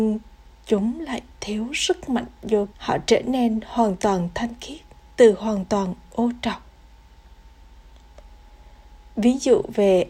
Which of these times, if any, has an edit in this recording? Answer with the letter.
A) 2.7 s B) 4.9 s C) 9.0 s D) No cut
A